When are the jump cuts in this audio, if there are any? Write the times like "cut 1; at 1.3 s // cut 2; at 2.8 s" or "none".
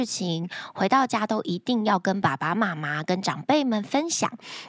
none